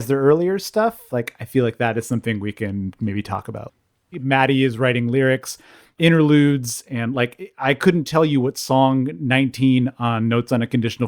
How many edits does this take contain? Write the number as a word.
two